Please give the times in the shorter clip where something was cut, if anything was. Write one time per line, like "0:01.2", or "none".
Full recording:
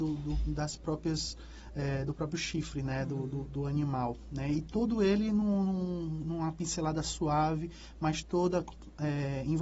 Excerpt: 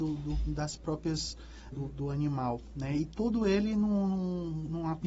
0:01.7